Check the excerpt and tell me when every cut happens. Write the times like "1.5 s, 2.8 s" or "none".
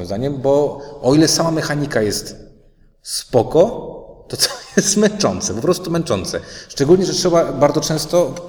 none

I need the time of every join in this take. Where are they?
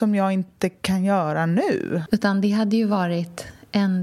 2.1 s

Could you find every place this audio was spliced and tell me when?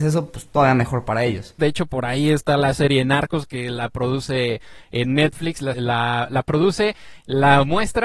1.6 s, 5.7 s

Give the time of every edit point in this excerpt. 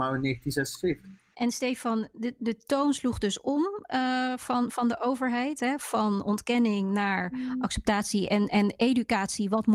none

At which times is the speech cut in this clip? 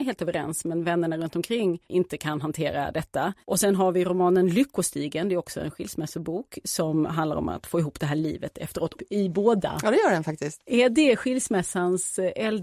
3.4 s, 9.0 s

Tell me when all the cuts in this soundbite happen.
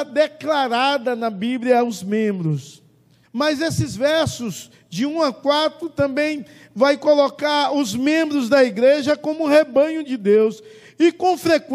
3.2 s

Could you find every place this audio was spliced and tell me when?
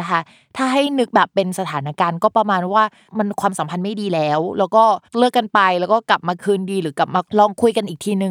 5.1 s

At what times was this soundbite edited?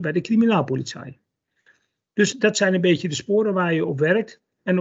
2.3 s

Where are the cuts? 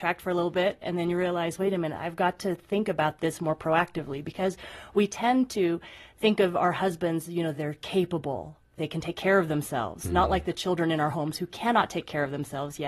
none

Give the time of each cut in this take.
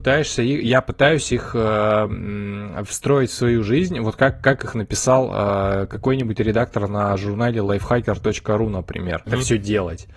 9.3 s

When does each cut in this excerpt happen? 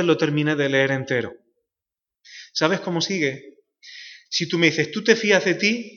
4.3 s

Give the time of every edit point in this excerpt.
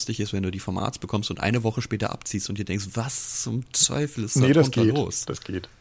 none

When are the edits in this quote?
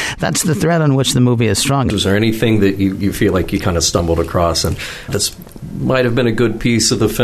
1.9 s, 5.1 s

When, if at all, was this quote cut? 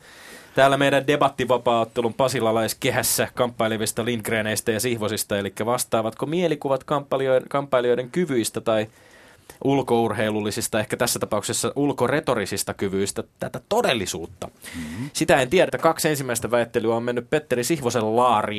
15.7 s

